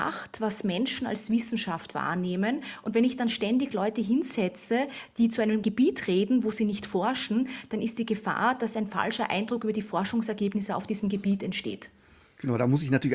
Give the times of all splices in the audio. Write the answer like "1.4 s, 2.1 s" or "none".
none